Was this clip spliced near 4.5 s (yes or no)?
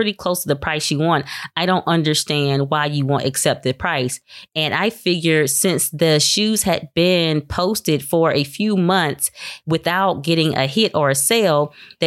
yes